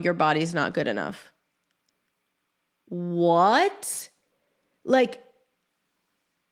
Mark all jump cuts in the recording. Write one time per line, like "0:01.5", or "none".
none